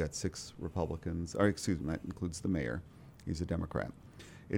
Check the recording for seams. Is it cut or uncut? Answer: cut